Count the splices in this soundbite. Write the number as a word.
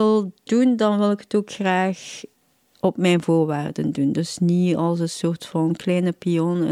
zero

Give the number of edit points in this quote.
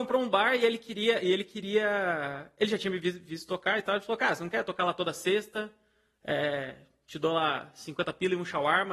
zero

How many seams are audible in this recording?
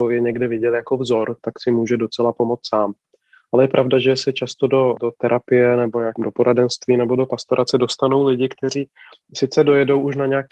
zero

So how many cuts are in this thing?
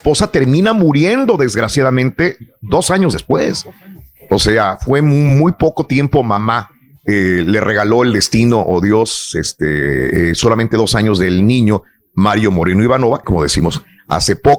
one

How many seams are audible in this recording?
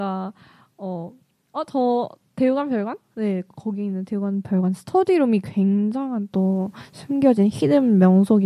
one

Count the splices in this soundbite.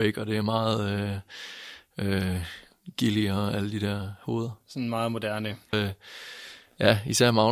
one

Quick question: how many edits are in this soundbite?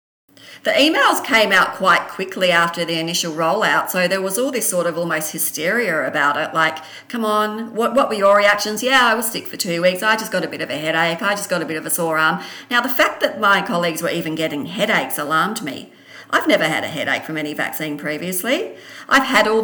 zero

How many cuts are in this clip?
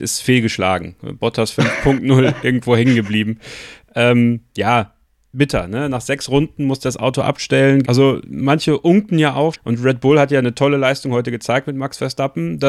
two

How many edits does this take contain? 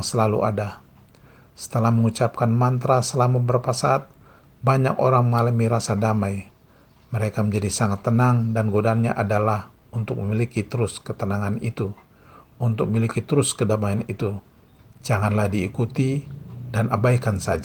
one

